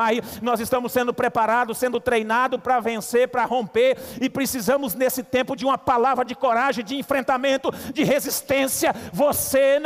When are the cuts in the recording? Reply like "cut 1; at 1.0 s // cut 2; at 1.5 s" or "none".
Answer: none